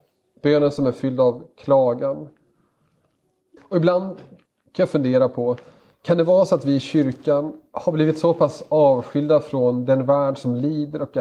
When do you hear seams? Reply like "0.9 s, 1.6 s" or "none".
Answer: 3.6 s

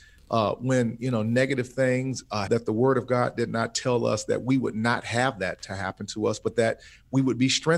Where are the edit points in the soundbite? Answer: 2.5 s

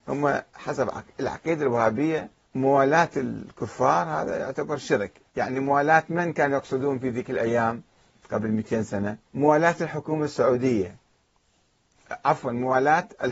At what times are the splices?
2.5 s, 9.3 s

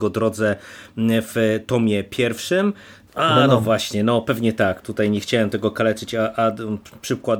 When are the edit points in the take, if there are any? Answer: 3.1 s, 4.8 s

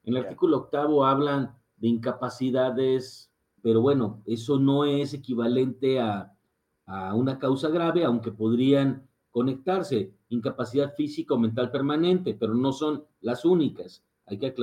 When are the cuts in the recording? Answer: 3.6 s

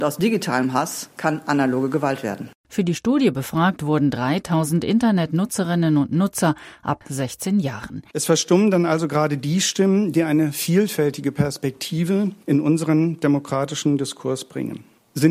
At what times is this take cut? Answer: 8.1 s, 12.4 s

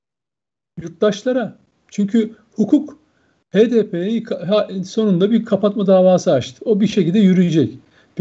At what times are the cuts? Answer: none

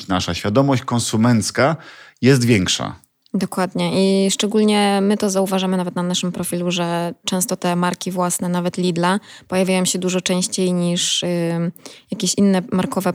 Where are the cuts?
none

